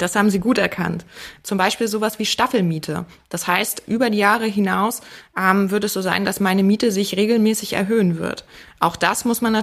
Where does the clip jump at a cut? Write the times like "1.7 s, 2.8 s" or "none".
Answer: 1.4 s